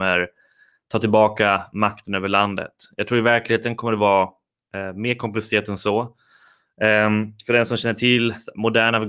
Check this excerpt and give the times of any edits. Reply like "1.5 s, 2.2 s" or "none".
none